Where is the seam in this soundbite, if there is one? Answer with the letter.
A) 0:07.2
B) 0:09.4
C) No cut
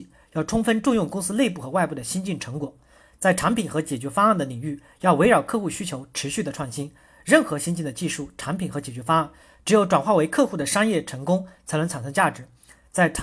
C